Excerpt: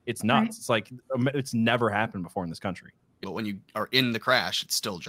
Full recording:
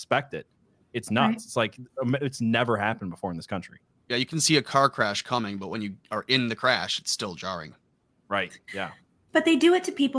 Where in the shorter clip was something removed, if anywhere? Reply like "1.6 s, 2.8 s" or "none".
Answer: 3.2 s